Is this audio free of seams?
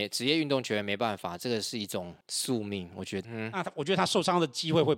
no; 2 cuts; at 2.2 s, 3.2 s

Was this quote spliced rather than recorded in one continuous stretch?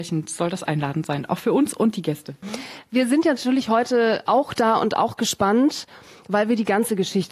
no; 0 cuts

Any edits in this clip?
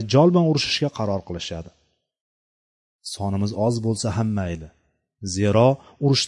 no; 0 cuts

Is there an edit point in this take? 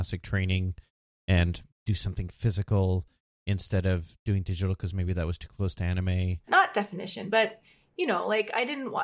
yes; 1 cut; at 6.5 s

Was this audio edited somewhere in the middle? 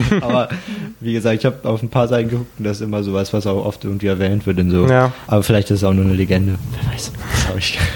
yes; 1 cut; at 5.3 s

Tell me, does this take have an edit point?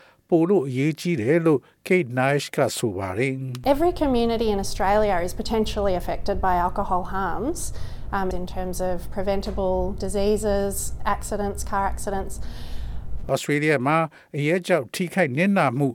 yes; 2 cuts; at 8.3 s, 13.2 s

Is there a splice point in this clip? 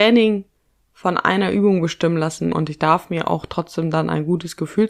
yes; 1 cut; at 2.5 s

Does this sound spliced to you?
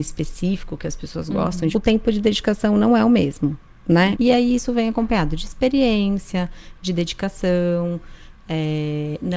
yes; 2 cuts; at 1.7 s, 4.1 s

